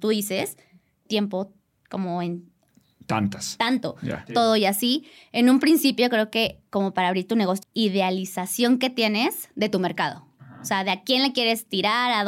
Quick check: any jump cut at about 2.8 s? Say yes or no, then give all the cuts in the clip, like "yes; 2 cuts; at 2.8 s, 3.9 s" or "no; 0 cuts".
no; 3 cuts; at 1.1 s, 4.3 s, 7.6 s